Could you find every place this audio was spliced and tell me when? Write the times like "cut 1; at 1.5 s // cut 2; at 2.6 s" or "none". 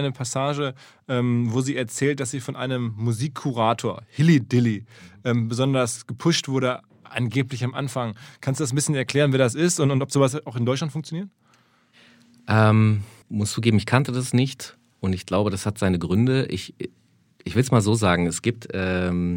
cut 1; at 13.2 s